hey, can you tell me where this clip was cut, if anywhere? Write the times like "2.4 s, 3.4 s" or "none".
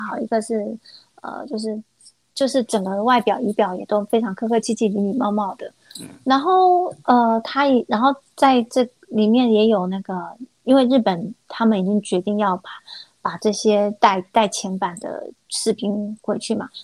none